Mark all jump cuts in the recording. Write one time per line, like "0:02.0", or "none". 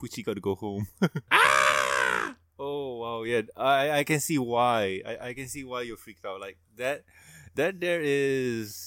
0:01.3

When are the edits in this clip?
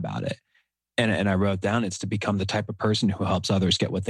none

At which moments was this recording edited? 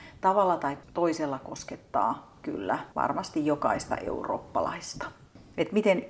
0:02.9

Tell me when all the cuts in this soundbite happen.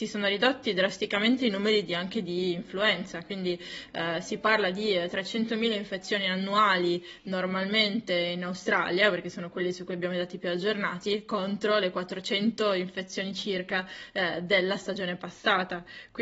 none

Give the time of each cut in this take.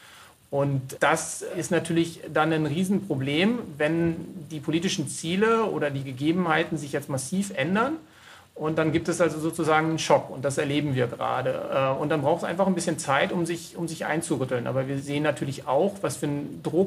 none

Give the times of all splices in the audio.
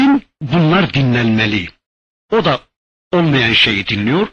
0:02.1

